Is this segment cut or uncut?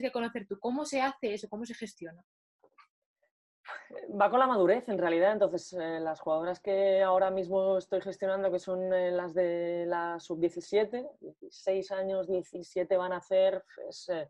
uncut